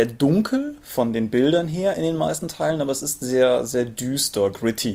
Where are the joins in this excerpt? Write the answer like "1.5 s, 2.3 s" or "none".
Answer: none